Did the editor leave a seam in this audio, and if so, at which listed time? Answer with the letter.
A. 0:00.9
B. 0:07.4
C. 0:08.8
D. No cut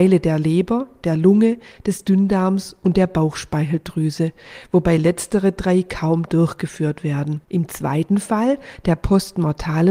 B